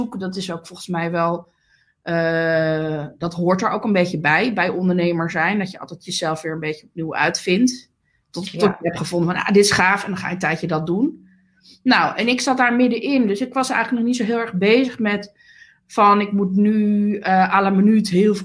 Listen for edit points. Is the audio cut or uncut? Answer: uncut